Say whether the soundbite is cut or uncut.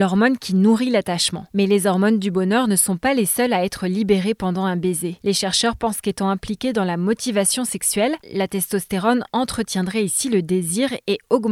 cut